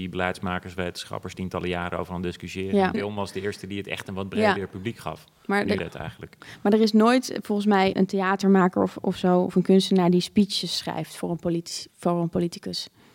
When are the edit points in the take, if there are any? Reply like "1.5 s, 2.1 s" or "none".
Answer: 2.9 s, 5.8 s, 7.9 s

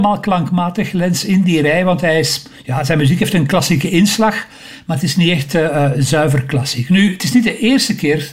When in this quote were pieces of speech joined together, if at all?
none

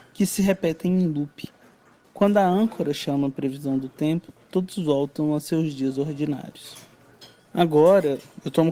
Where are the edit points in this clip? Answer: 2.0 s, 7.4 s

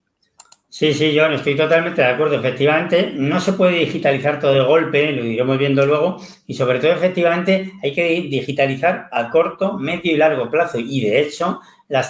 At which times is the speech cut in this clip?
none

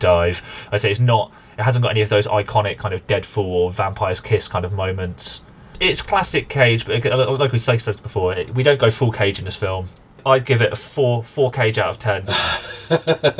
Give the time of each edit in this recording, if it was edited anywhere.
none

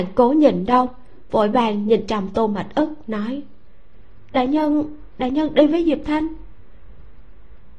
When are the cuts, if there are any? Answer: 2.1 s

